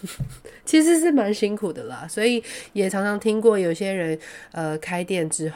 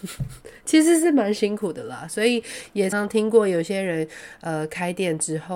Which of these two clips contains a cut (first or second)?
second